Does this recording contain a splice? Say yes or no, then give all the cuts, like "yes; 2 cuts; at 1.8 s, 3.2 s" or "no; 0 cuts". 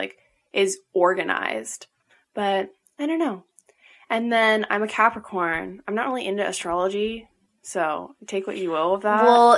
no; 0 cuts